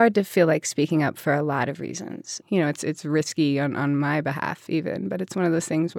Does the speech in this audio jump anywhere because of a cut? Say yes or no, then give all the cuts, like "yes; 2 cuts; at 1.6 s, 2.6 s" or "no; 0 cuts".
yes; 1 cut; at 2.4 s